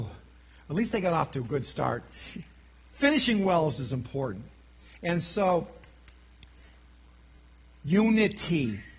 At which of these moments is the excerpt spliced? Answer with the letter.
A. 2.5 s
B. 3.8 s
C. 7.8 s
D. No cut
B